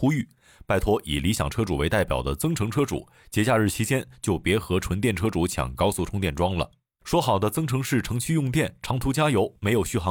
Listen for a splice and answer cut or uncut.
uncut